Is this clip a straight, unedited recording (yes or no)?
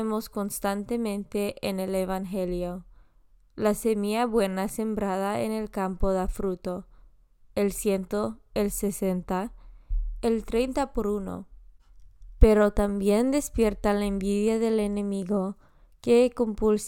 yes